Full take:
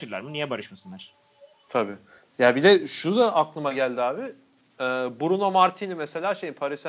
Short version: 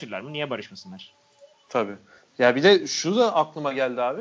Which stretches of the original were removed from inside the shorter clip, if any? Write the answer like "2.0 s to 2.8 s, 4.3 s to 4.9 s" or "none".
none